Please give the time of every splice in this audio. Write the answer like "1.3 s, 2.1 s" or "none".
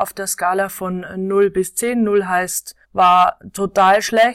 2.8 s